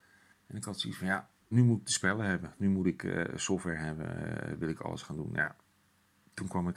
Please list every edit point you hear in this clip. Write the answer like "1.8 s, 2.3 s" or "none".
1.5 s